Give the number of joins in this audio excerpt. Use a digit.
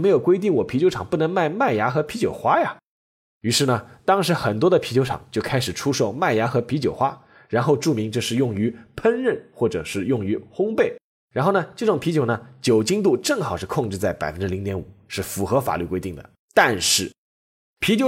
2